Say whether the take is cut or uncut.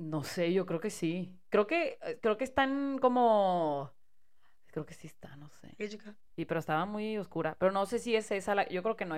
cut